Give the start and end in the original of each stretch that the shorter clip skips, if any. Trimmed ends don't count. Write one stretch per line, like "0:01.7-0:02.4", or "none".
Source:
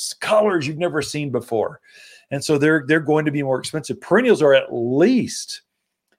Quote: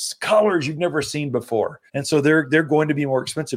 0:01.9-0:02.2